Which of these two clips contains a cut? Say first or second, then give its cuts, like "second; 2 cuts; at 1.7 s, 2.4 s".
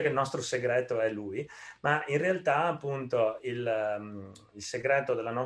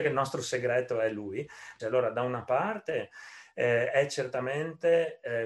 second; 1 cut; at 1.8 s